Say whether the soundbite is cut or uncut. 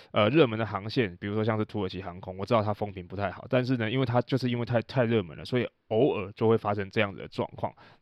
uncut